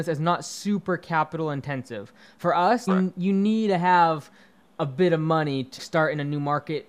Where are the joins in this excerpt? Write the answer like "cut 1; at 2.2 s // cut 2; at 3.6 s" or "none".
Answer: cut 1; at 2.9 s // cut 2; at 5.8 s